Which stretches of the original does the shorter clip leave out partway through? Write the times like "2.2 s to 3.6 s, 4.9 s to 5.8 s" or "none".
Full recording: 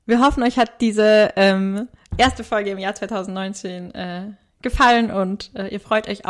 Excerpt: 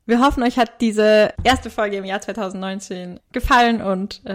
1.3 s to 2.1 s, 3.9 s to 4.5 s